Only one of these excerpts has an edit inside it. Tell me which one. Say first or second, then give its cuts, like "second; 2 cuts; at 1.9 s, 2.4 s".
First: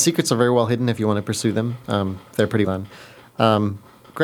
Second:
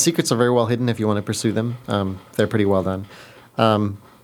first; 1 cut; at 2.6 s